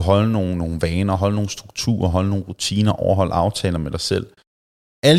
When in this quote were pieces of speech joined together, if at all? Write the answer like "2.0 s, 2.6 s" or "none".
none